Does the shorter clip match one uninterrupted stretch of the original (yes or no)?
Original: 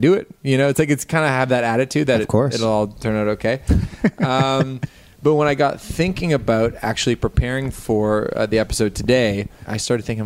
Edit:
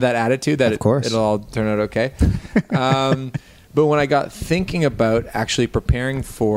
yes